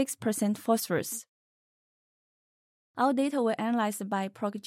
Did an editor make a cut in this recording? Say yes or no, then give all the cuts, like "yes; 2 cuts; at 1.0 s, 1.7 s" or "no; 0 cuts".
yes; 1 cut; at 2.8 s